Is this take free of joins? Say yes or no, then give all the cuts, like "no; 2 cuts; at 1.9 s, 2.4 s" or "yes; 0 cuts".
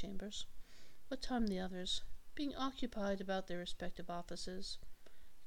yes; 0 cuts